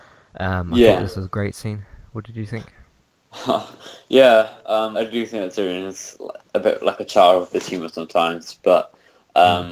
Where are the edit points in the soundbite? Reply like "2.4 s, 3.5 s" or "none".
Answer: 4.9 s

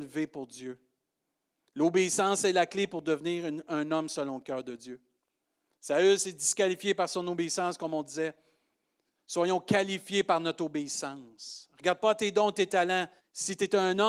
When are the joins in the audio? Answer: 13.2 s

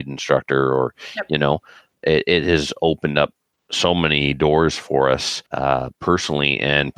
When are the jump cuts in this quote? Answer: 5.5 s

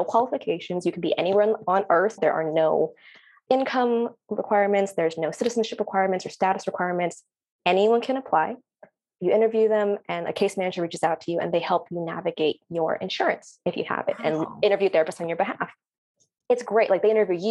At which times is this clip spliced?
2.2 s

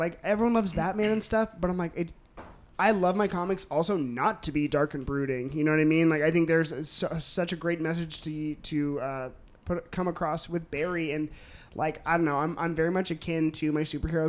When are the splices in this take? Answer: none

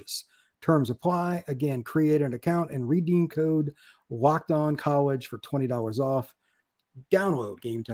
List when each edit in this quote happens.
none

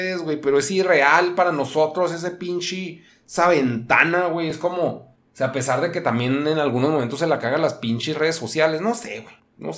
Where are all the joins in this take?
none

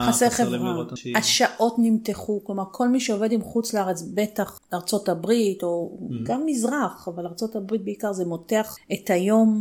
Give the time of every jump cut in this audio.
none

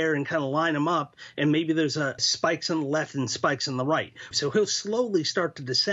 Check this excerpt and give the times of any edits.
2.2 s, 4.3 s

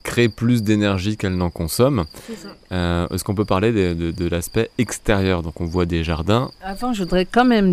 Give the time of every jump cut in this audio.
none

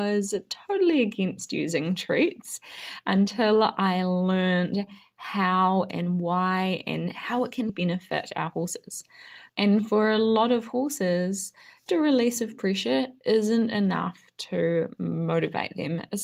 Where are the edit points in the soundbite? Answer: 7.7 s, 9.5 s, 11.9 s

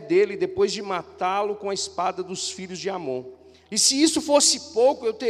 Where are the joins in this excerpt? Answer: 3.6 s

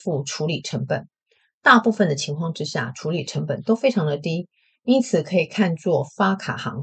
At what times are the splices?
none

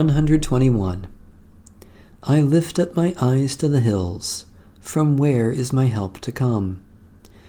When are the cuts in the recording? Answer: none

